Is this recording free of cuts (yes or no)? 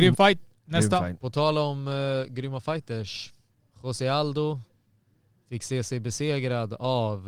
yes